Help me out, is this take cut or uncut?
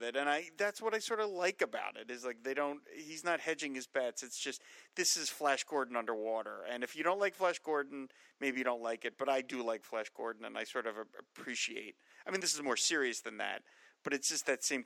uncut